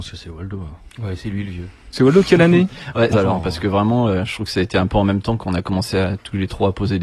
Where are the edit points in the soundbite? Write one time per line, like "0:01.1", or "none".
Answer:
0:03.1